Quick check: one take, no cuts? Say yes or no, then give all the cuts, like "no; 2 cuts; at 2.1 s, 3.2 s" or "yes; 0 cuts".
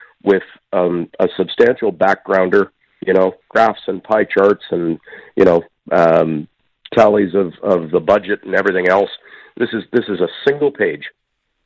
yes; 0 cuts